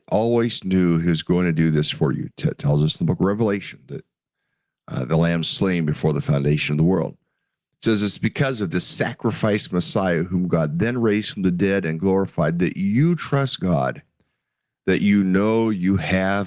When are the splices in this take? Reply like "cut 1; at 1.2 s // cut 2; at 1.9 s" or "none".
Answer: none